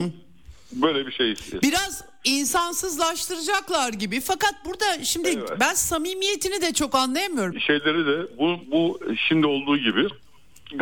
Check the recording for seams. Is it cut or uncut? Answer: cut